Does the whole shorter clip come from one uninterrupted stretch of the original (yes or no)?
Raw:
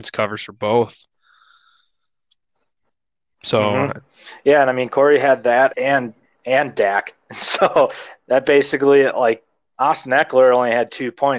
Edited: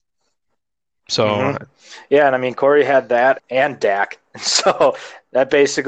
no